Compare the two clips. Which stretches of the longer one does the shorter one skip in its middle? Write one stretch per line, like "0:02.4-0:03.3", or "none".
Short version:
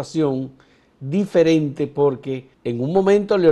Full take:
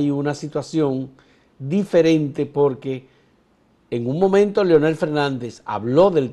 0:03.1-0:03.8

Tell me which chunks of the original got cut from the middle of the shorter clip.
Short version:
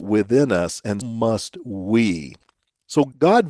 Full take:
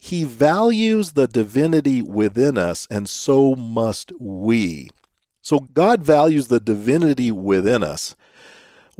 0:03.1-0:03.6

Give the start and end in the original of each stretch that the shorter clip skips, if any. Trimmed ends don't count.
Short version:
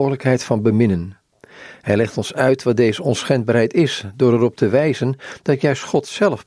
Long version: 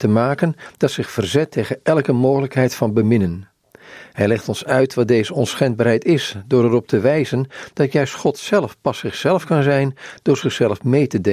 none

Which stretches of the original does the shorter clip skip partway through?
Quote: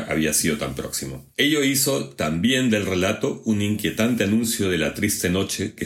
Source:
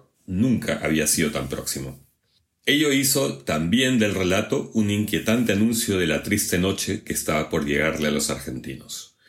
0:02.1-0:02.6

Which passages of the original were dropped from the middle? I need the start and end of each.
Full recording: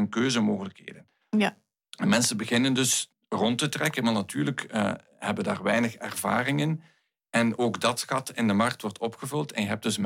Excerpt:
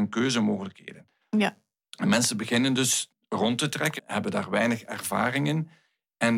0:04.0-0:05.1

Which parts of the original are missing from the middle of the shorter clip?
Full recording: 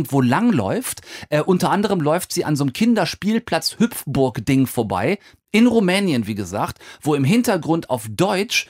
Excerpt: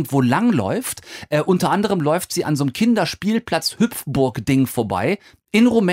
none

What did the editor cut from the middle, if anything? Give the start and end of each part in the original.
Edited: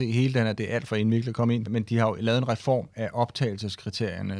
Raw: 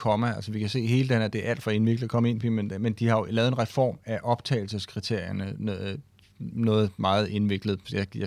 0:02.4-0:02.8

